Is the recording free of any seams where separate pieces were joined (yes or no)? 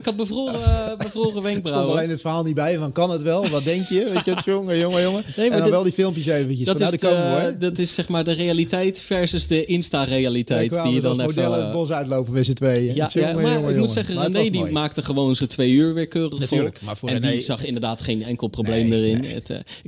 yes